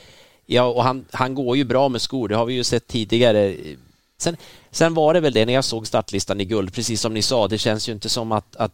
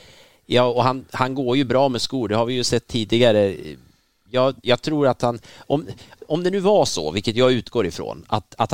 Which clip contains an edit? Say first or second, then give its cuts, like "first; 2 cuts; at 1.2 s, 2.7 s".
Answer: first; 1 cut; at 4.2 s